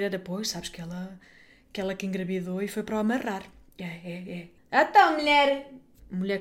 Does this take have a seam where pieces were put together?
yes; 1 cut; at 4.6 s

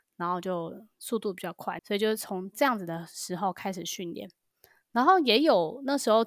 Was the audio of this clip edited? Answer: yes; 1 cut; at 1.8 s

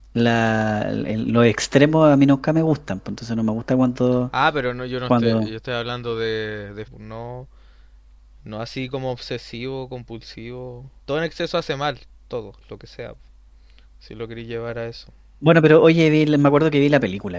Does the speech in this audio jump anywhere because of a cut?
yes; 2 cuts; at 6.9 s, 11.0 s

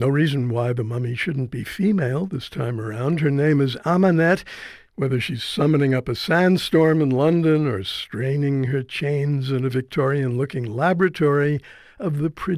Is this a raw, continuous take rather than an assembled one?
no; 1 cut; at 4.9 s

